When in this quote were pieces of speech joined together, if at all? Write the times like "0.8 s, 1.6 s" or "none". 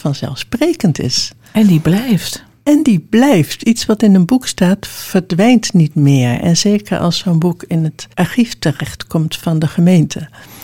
8.1 s

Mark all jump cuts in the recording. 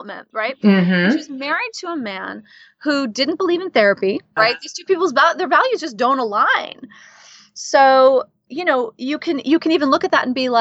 4.4 s

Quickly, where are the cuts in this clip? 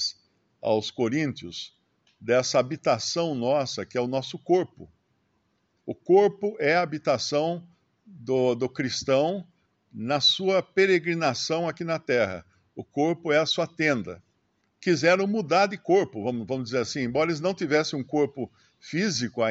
14.6 s

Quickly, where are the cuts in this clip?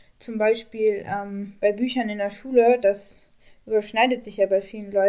none

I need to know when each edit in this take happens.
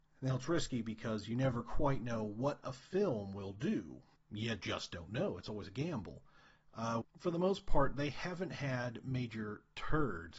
4.2 s, 7.0 s

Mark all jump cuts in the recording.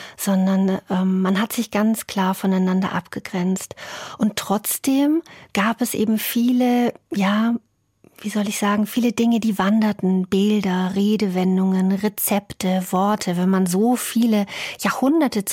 none

